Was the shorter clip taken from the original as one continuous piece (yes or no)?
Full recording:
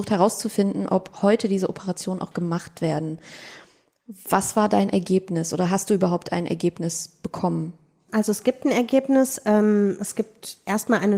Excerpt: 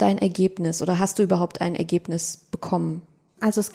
yes